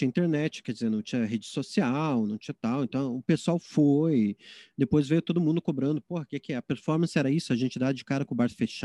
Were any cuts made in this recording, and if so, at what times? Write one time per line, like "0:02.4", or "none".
none